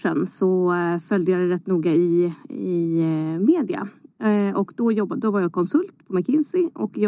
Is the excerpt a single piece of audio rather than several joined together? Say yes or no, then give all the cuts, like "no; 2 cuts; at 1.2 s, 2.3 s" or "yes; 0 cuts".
yes; 0 cuts